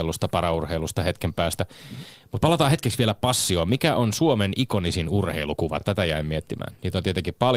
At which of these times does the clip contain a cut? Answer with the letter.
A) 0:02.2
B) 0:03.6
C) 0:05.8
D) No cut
D